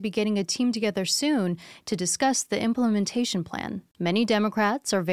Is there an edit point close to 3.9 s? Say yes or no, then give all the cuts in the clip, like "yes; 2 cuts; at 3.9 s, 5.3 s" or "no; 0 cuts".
yes; 1 cut; at 3.9 s